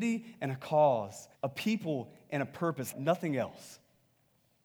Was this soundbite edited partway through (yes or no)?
yes